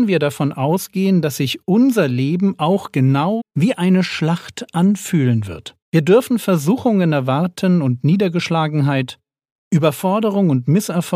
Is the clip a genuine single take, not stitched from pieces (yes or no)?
no